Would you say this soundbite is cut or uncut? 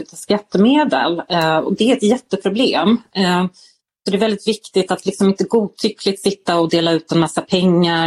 uncut